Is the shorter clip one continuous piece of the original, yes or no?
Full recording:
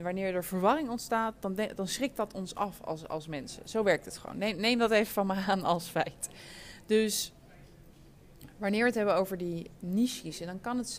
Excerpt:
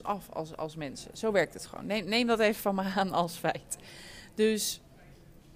yes